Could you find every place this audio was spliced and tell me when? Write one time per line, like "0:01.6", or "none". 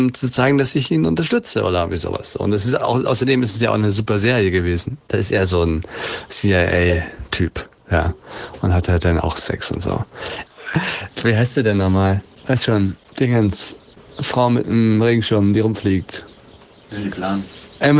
0:10.5